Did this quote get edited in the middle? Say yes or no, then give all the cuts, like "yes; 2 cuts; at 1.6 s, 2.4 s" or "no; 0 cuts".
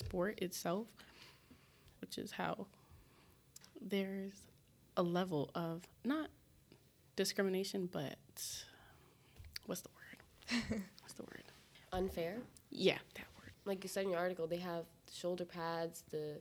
yes; 2 cuts; at 2.0 s, 13.5 s